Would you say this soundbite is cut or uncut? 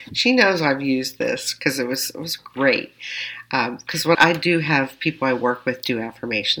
cut